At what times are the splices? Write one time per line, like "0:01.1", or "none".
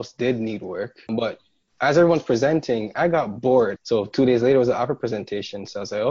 0:01.1
0:03.7